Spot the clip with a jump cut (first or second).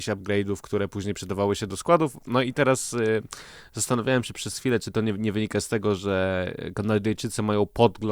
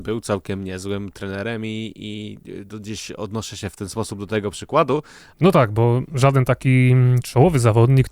second